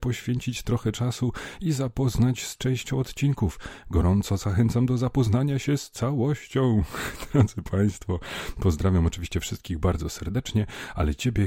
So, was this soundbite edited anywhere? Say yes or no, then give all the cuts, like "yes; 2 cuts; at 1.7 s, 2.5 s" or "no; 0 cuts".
no; 0 cuts